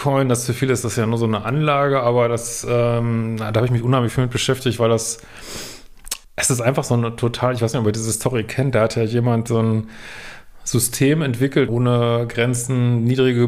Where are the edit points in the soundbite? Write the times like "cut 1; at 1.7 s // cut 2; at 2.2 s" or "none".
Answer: cut 1; at 6.2 s // cut 2; at 9.5 s // cut 3; at 11.7 s